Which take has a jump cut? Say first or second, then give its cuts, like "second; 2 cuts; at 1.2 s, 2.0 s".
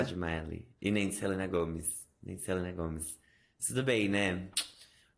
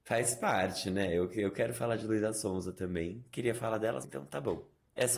second; 1 cut; at 4.0 s